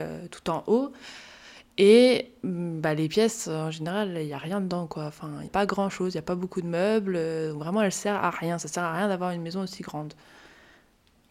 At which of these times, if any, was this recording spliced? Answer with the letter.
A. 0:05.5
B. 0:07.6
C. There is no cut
A